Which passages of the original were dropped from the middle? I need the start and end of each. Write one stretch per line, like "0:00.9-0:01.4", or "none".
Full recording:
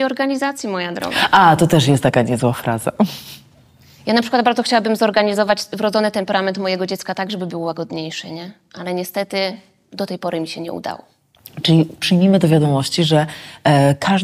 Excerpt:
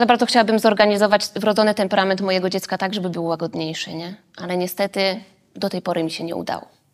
none